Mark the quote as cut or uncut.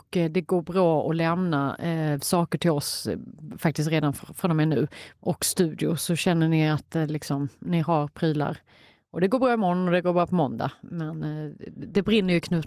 cut